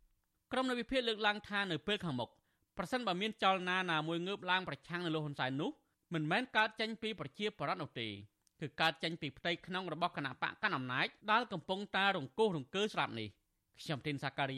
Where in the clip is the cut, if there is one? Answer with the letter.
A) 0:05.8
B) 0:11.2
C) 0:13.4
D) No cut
B